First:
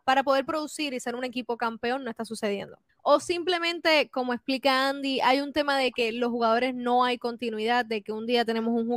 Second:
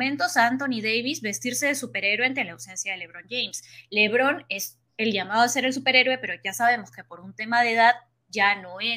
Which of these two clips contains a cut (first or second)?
first